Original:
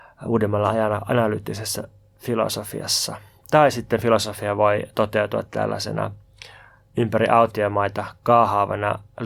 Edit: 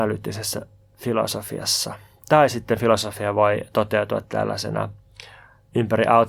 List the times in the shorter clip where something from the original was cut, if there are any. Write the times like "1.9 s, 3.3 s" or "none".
none

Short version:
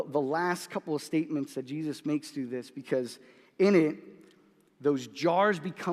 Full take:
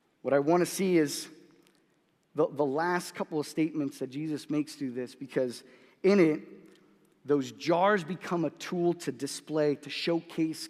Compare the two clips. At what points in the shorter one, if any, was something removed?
none

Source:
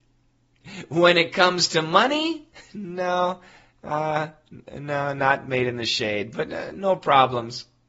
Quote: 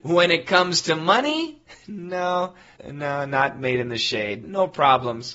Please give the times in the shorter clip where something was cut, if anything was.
2.8 s, 4.4 s

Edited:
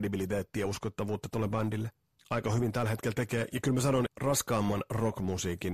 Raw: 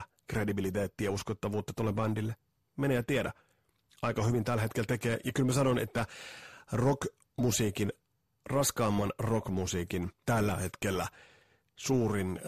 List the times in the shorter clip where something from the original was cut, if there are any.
2.2 s, 4.1 s

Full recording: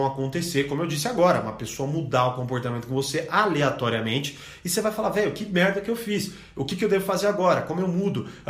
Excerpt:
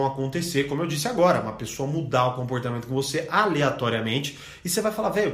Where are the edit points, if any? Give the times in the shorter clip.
none

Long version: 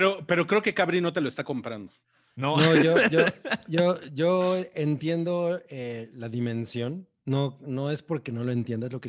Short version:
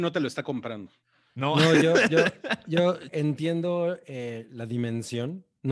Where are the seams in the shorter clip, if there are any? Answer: 3.1 s

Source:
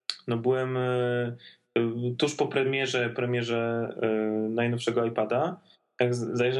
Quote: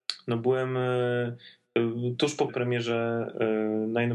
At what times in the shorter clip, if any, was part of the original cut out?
2.5 s

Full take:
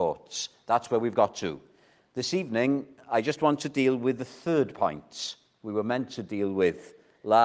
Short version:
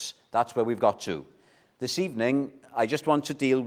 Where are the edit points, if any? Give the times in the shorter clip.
none

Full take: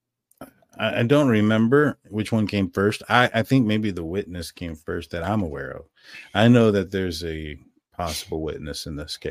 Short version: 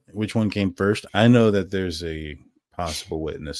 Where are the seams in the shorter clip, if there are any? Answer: 1.1 s

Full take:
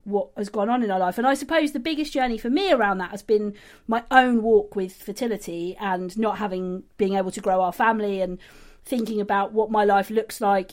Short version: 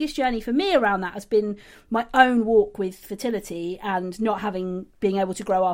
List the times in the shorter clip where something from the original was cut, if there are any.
none

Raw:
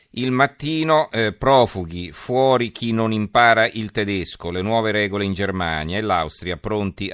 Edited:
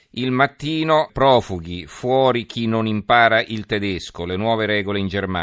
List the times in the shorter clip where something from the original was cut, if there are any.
1.1 s

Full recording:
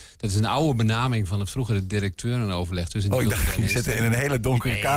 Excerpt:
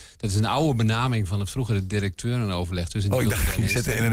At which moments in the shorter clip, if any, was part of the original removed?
none

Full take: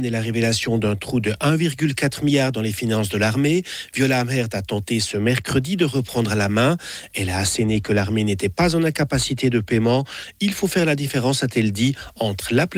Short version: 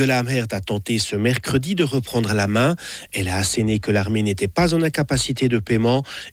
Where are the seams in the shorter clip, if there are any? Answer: none

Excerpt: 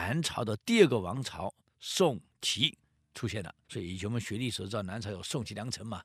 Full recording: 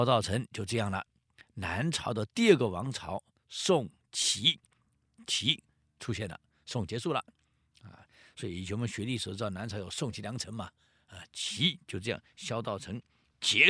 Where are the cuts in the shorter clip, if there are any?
2.4 s, 3.6 s

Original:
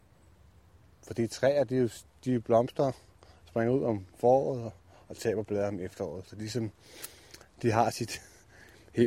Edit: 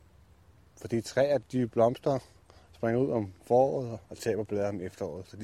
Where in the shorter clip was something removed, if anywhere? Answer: 1.4 s, 4.0 s

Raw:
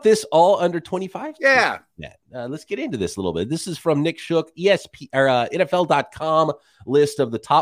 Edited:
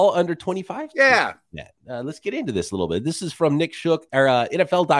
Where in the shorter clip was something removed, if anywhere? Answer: 4.1 s

